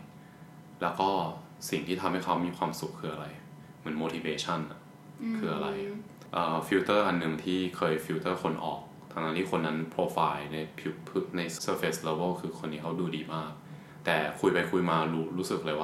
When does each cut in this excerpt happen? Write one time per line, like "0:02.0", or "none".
0:11.6